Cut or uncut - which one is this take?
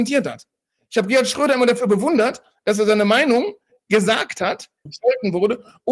cut